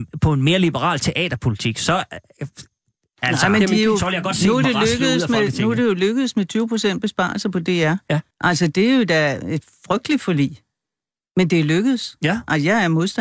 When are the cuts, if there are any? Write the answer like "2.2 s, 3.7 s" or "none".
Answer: 8.3 s